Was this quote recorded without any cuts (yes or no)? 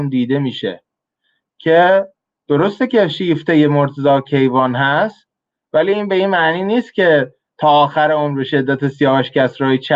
yes